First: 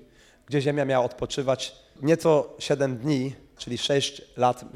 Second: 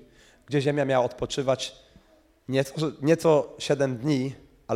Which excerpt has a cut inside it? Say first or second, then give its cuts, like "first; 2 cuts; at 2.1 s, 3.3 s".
first; 2 cuts; at 2.0 s, 3.6 s